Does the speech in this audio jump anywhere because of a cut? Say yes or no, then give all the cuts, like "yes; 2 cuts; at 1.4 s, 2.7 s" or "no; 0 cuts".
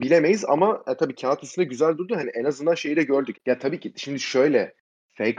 yes; 1 cut; at 3.3 s